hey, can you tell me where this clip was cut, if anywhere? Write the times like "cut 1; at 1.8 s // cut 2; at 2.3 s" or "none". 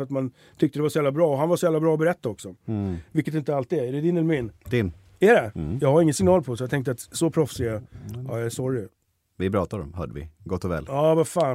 none